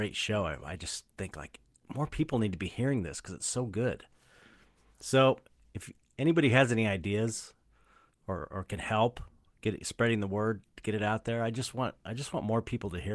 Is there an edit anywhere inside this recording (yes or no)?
no